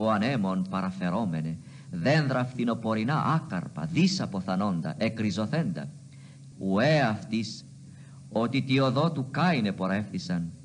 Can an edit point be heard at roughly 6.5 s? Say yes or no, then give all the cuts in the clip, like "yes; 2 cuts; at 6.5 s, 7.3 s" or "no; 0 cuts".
yes; 1 cut; at 6.5 s